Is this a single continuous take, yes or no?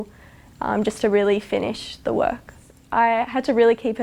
yes